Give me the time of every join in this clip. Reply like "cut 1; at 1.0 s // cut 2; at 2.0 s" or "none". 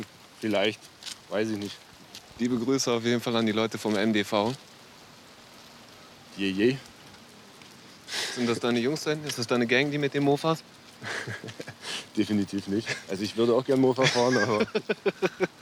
none